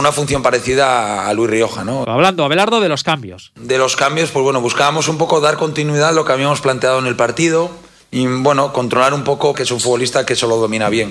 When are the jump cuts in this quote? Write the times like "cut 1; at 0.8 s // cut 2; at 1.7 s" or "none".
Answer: cut 1; at 2.0 s // cut 2; at 9.5 s